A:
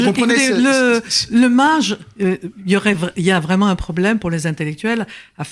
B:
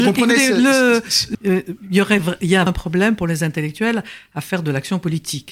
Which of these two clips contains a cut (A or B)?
B